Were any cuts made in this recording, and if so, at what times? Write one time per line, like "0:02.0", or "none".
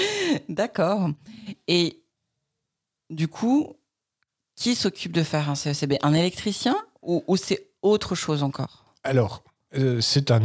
none